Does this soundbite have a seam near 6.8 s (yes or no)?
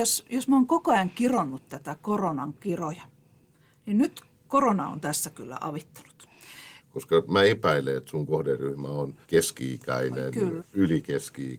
yes